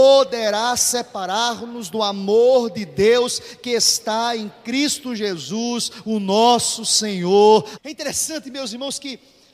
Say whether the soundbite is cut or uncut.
cut